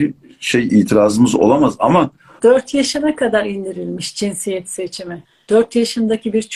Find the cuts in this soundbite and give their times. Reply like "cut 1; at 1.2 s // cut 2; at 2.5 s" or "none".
cut 1; at 2.4 s